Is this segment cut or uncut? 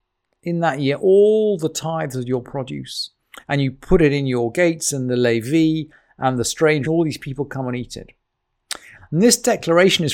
cut